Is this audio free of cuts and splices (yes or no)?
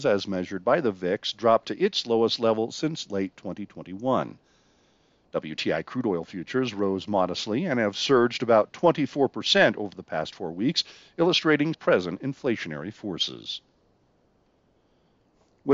no